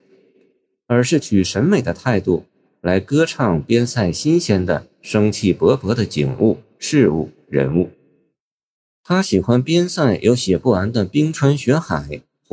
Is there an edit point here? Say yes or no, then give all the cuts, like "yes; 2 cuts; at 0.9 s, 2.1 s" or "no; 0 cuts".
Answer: no; 0 cuts